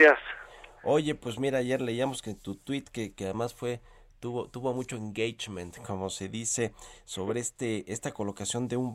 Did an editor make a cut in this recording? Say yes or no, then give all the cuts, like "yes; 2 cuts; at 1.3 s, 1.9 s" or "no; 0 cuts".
no; 0 cuts